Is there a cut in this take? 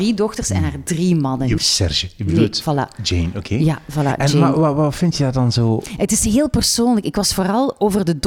yes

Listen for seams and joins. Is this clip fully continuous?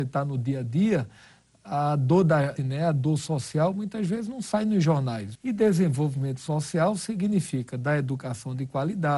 no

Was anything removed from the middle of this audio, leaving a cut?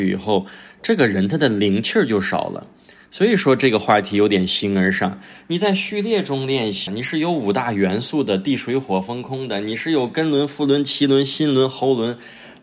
yes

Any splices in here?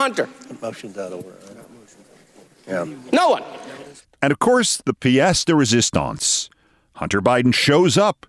no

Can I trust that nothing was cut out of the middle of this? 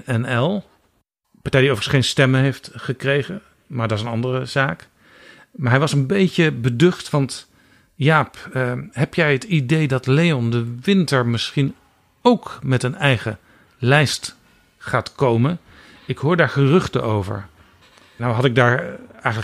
yes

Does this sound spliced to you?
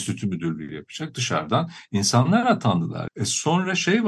yes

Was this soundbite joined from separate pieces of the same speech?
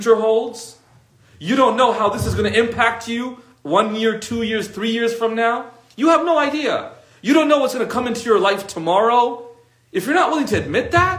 no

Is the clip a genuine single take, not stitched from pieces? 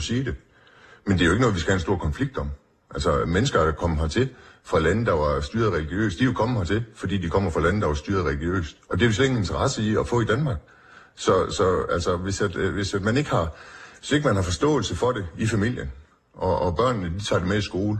yes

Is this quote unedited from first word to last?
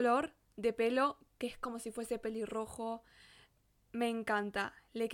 yes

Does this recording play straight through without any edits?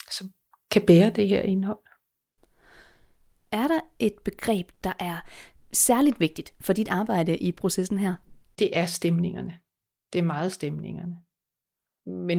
yes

